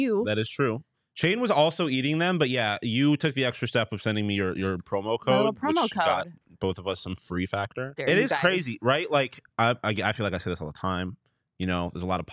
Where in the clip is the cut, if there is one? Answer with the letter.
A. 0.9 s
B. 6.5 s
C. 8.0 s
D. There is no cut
C